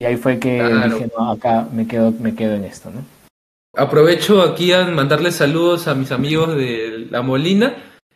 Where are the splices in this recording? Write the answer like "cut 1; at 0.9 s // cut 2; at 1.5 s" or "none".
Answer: cut 1; at 3.7 s